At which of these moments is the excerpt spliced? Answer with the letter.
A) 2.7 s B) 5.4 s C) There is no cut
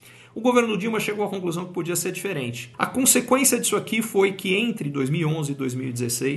A